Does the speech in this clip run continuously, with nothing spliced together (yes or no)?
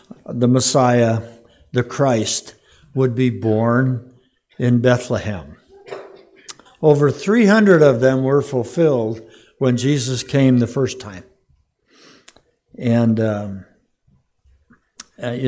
no